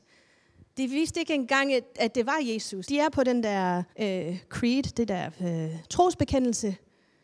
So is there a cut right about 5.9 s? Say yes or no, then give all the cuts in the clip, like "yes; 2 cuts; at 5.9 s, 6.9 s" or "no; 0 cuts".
no; 2 cuts; at 2.8 s, 3.9 s